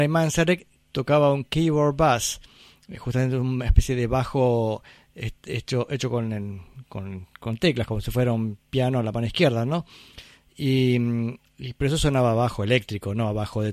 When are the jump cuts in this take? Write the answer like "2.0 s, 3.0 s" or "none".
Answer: none

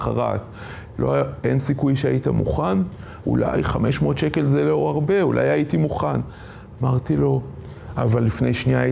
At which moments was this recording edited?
0.9 s, 3.2 s

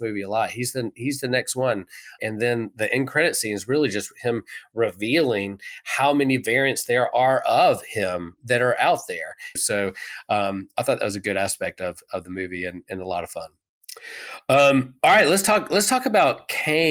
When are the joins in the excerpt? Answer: 2.2 s, 9.6 s

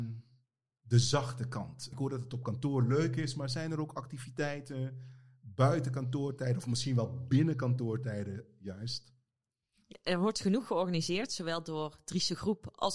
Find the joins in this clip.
1.9 s

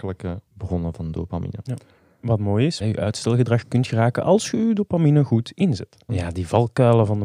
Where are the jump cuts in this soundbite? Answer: 1.7 s, 2.8 s, 6.1 s

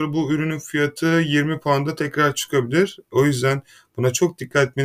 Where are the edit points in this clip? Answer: none

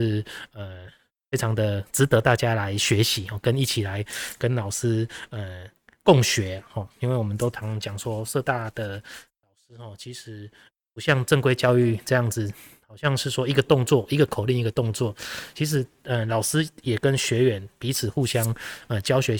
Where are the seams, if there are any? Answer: none

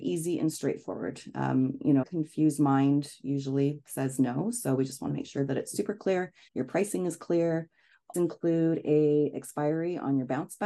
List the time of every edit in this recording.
2.0 s, 6.5 s, 8.1 s

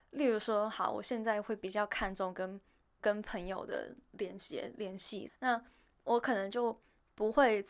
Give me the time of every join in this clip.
3.0 s, 5.3 s

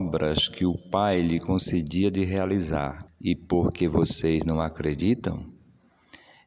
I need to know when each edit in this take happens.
3.1 s

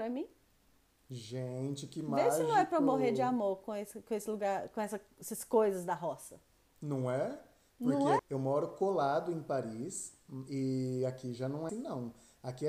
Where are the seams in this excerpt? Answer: 8.2 s, 11.7 s

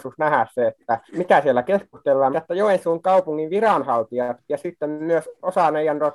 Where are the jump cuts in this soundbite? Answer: 1.1 s, 2.3 s

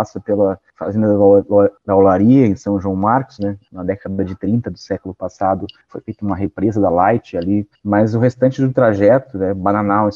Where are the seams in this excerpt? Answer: 3.4 s, 5.9 s, 7.7 s

